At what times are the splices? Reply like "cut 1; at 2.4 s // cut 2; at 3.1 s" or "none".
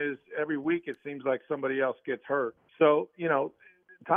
cut 1; at 2.6 s